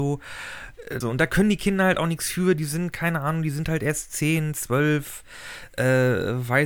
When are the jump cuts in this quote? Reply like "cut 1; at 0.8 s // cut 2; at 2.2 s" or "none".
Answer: cut 1; at 1.0 s

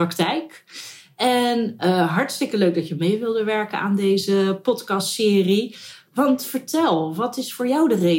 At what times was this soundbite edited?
none

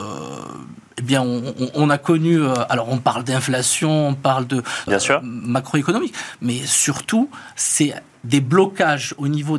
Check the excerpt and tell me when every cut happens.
cut 1; at 4.9 s

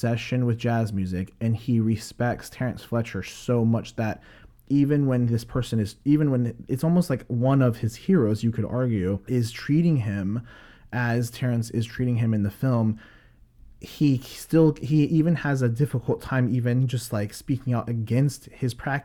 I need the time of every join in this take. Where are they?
none

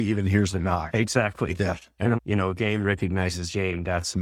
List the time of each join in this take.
cut 1; at 2.2 s

